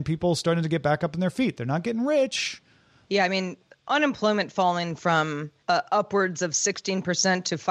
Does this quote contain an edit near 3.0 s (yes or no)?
yes